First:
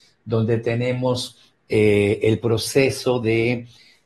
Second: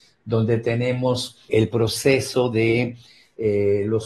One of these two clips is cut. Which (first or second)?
second